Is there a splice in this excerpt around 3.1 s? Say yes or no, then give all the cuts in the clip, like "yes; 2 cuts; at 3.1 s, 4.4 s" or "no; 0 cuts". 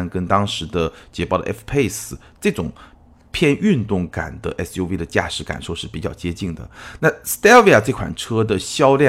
no; 1 cut; at 7.0 s